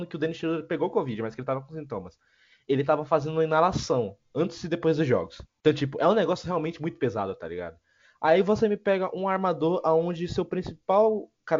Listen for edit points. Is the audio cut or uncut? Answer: uncut